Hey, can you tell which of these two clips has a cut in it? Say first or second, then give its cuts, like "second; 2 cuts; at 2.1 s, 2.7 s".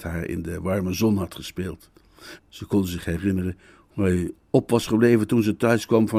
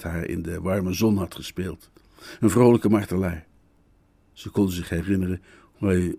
first; 1 cut; at 2.4 s